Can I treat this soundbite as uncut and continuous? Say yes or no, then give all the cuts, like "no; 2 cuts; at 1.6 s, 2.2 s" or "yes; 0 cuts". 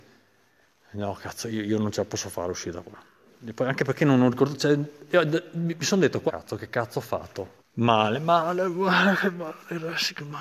no; 2 cuts; at 6.3 s, 7.6 s